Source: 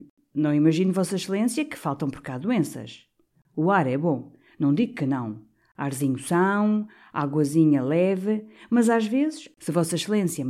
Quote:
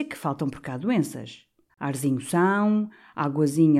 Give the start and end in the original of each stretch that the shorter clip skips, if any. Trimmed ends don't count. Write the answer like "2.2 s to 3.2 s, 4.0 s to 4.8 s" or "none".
3.3 s to 5.7 s